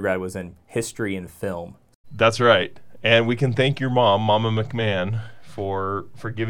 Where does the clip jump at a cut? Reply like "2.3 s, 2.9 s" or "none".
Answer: 2.0 s